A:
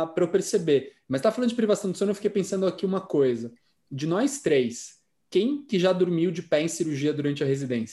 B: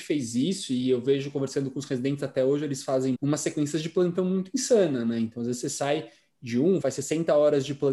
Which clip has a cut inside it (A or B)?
B